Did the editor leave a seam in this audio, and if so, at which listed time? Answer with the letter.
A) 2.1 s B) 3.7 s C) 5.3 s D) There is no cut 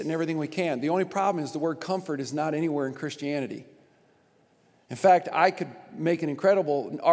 C